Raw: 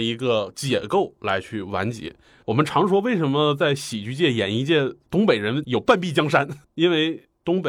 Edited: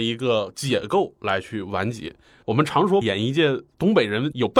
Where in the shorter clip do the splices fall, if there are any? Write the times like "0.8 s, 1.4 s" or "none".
3.0 s